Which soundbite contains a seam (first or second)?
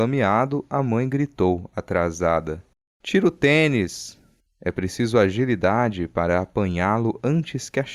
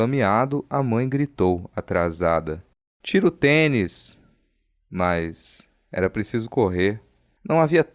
first